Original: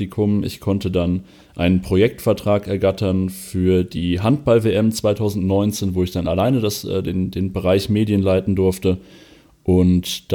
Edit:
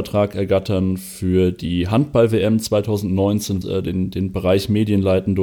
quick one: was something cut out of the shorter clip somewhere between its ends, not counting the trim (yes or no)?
yes